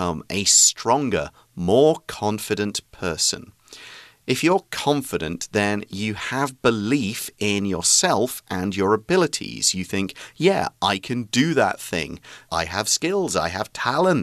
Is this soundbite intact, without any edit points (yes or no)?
no